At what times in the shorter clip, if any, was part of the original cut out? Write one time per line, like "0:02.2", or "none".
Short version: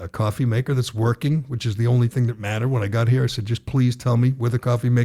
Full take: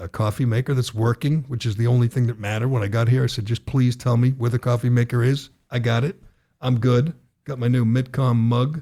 none